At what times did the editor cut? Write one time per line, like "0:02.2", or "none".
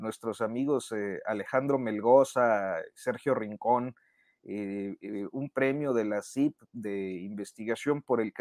none

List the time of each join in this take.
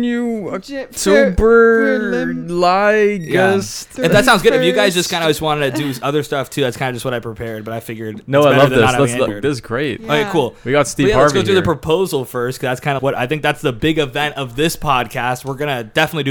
0:09.3
0:13.0

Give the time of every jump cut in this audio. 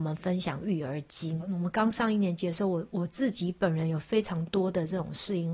0:01.4

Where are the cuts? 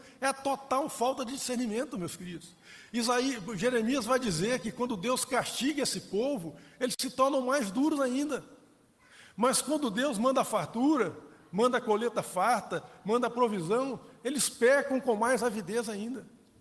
none

